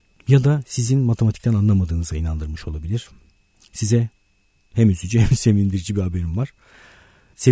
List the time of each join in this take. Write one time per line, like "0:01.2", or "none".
none